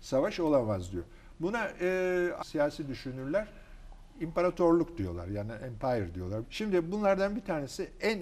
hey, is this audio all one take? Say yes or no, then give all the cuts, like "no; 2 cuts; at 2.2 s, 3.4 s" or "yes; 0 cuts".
no; 2 cuts; at 2.4 s, 6.4 s